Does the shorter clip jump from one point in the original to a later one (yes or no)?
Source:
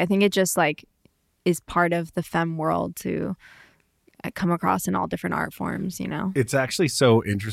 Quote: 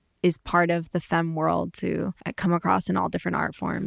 yes